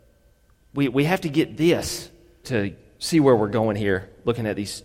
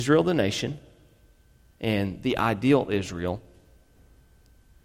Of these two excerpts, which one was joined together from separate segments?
first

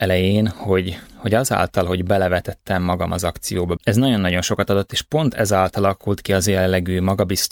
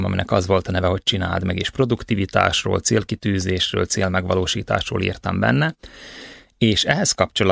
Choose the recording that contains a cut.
first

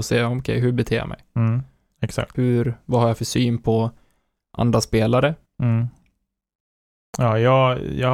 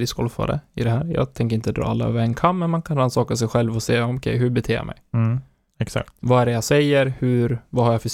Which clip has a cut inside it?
first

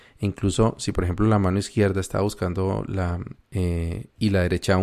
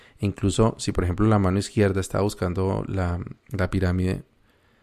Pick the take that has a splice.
first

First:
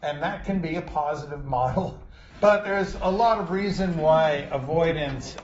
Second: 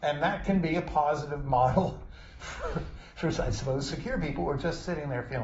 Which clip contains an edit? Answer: first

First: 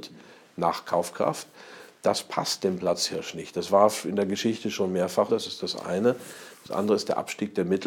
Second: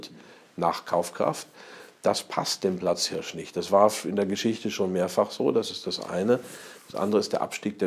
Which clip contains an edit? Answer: first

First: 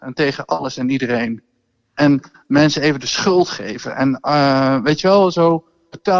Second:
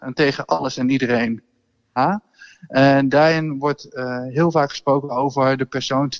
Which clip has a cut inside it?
second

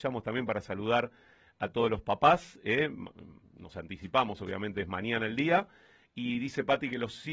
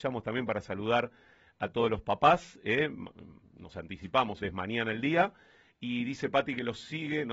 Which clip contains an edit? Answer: second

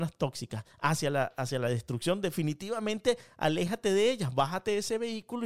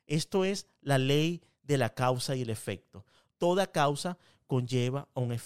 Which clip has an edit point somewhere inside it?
second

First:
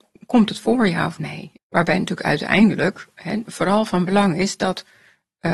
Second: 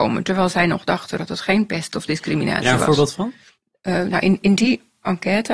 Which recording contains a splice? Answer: first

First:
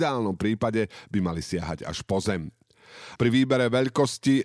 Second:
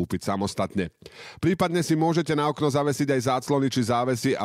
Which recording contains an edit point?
first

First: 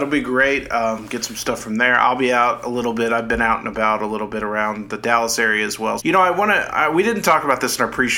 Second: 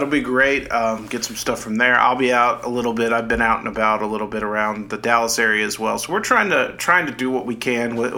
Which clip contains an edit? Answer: first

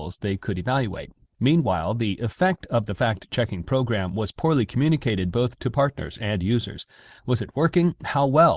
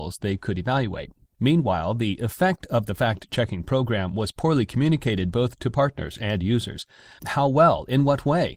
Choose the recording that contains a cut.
second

